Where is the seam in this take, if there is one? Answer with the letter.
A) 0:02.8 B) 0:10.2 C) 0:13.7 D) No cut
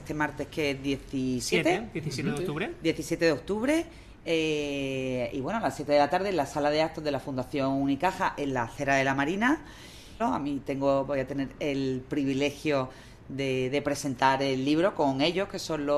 B